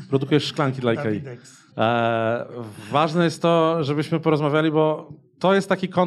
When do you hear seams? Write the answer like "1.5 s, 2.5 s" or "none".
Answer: 1.7 s